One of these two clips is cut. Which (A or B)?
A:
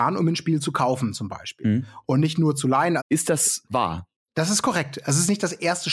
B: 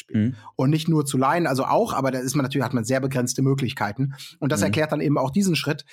A